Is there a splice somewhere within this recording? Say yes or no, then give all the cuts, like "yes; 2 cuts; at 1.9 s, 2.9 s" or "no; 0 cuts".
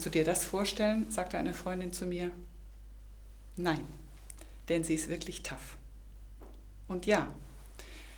no; 0 cuts